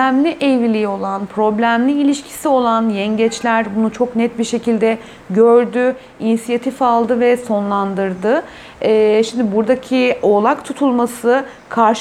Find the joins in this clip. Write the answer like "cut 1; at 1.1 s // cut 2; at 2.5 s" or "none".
none